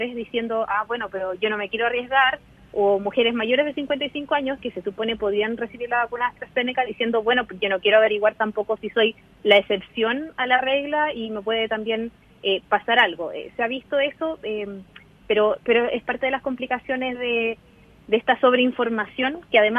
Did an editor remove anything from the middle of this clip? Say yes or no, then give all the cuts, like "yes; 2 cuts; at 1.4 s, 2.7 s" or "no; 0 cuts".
no; 0 cuts